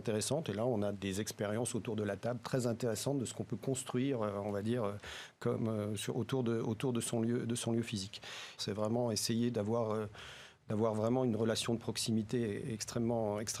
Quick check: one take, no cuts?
no; 2 cuts; at 0.9 s, 8.6 s

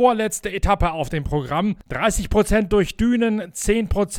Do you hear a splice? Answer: yes; 1 cut; at 1.8 s

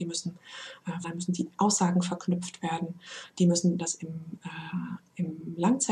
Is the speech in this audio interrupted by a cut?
yes; 2 cuts; at 1.0 s, 3.8 s

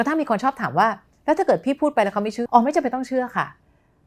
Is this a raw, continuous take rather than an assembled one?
no; 1 cut; at 2.5 s

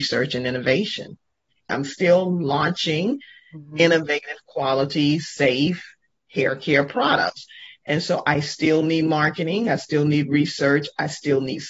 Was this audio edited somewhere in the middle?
yes; 1 cut; at 1.7 s

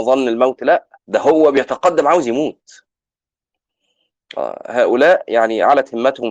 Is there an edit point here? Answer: yes; 1 cut; at 1.0 s

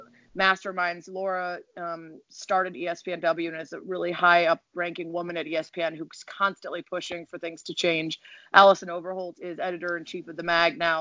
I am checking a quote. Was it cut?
no; 0 cuts

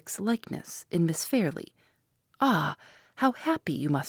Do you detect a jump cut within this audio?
yes; 1 cut; at 2.2 s

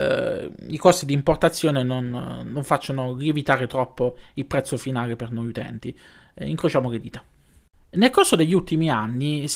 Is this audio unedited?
yes; 0 cuts

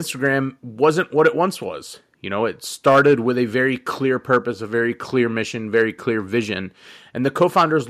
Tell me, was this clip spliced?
no; 0 cuts

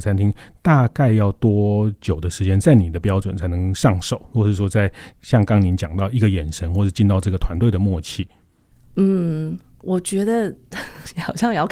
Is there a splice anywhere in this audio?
no; 0 cuts

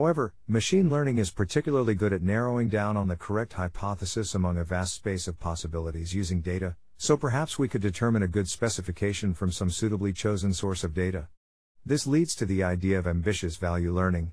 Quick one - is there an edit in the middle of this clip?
no; 0 cuts

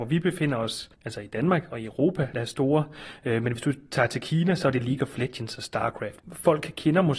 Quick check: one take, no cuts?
no; 3 cuts; at 0.9 s, 2.3 s, 6.2 s

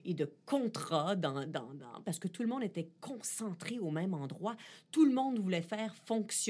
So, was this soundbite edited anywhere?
yes; 1 cut; at 2.0 s

